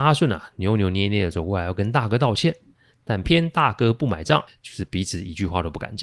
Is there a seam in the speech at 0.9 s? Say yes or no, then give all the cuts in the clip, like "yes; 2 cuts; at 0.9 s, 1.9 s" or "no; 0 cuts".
no; 2 cuts; at 3.2 s, 4.5 s